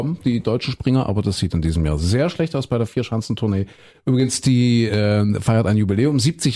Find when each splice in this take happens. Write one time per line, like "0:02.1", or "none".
none